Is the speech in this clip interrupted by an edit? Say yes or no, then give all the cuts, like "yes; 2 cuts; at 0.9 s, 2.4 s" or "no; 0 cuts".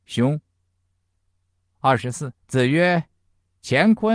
yes; 1 cut; at 2.4 s